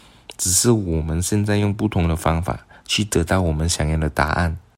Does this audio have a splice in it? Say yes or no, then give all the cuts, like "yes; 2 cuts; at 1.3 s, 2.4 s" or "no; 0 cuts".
no; 0 cuts